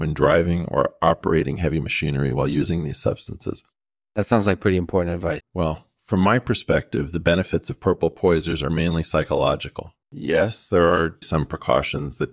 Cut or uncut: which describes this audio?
cut